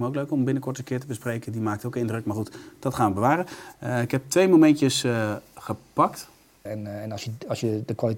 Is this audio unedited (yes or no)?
no